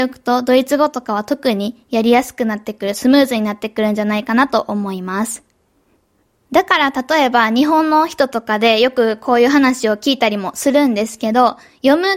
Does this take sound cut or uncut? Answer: uncut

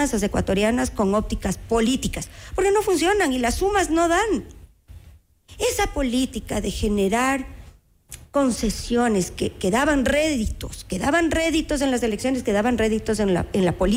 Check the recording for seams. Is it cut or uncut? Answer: uncut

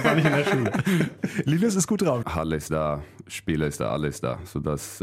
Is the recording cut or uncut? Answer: cut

